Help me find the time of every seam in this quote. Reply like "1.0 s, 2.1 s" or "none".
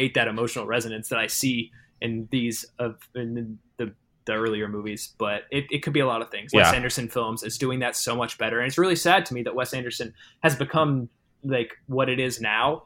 6.5 s